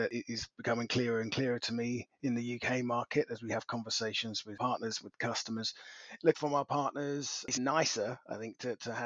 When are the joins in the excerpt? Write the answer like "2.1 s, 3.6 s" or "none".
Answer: 6.3 s, 7.6 s

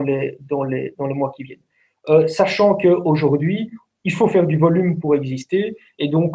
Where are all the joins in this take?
0.9 s, 5.0 s

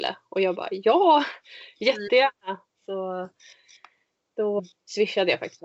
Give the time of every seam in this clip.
4.6 s

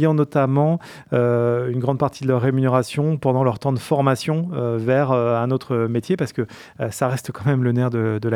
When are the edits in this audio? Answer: none

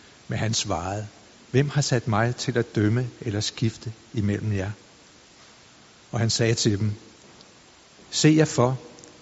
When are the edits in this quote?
1.3 s

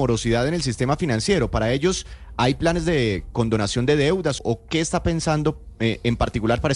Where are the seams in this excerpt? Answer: 4.4 s

